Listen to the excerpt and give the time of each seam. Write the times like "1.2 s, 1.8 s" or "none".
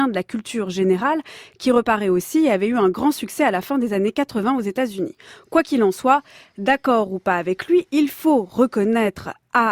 none